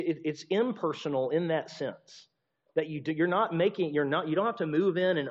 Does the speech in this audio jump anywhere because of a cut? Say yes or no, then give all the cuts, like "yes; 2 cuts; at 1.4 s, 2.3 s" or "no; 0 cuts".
no; 0 cuts